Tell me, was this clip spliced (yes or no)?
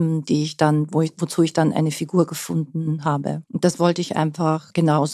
yes